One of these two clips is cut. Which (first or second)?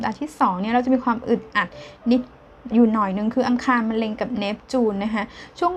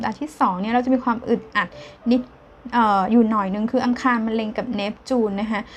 first